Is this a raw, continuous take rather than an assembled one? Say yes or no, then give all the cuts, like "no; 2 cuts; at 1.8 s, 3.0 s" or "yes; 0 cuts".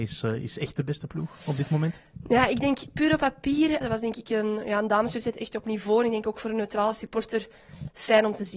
no; 1 cut; at 3.8 s